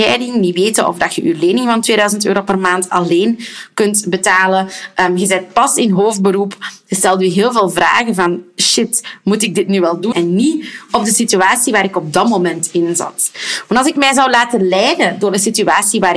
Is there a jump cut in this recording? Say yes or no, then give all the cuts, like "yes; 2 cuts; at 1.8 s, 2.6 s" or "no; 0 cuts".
yes; 1 cut; at 10.1 s